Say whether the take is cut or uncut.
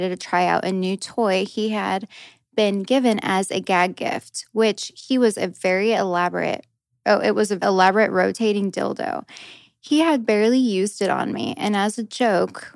cut